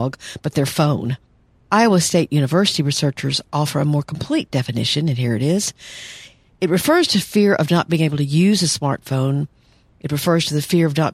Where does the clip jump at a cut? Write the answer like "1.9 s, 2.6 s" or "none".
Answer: none